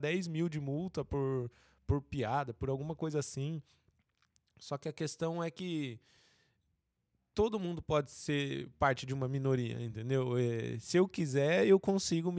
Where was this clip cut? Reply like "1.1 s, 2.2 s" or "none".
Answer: none